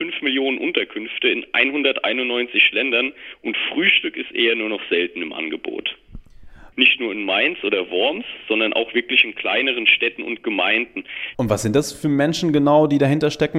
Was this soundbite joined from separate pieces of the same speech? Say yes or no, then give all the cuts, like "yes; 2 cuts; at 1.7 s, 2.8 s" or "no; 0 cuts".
yes; 2 cuts; at 6.7 s, 11.3 s